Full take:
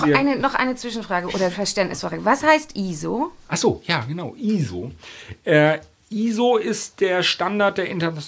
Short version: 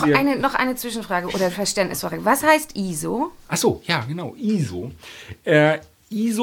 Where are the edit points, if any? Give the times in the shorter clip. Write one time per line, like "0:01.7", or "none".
none